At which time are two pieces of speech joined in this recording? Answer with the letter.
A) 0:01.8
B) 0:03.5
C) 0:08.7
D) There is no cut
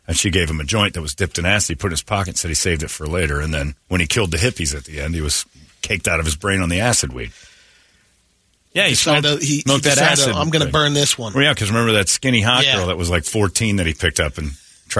C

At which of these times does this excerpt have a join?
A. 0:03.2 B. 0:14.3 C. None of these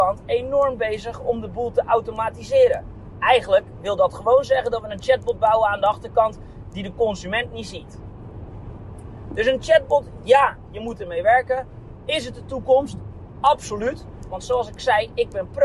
B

